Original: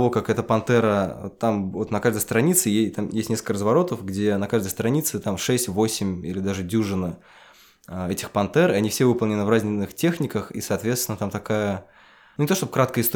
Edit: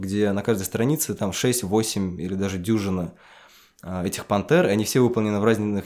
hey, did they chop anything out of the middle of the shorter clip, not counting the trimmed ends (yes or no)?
no